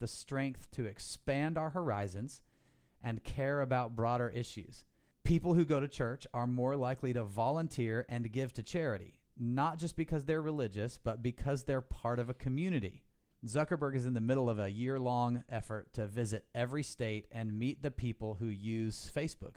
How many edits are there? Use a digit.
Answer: 1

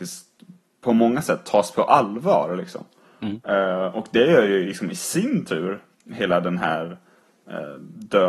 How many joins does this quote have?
0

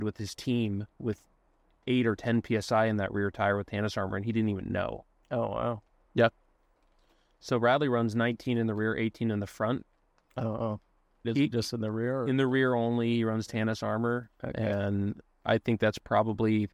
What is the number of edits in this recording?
2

